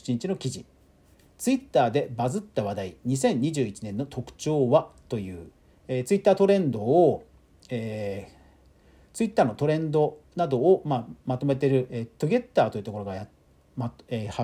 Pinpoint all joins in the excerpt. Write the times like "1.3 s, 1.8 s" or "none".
none